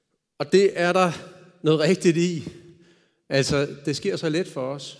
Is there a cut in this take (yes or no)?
no